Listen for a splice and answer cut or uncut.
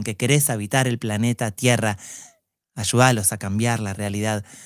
uncut